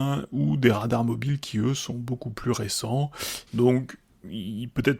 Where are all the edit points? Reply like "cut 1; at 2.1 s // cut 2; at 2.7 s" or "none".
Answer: cut 1; at 3.5 s